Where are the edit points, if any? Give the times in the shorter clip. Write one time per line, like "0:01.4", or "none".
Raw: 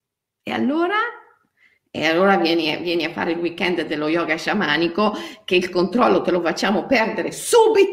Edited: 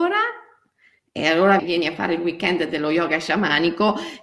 0:01.6